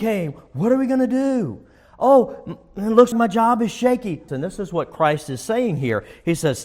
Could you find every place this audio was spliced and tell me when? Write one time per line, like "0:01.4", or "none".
0:03.1
0:04.3